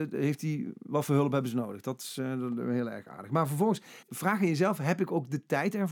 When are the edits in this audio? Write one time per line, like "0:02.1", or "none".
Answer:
0:04.0